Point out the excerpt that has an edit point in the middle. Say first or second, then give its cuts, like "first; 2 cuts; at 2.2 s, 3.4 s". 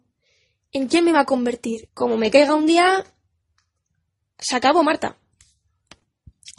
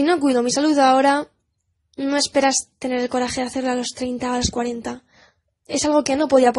first; 1 cut; at 1.9 s